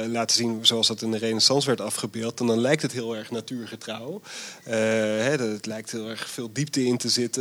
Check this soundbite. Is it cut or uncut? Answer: uncut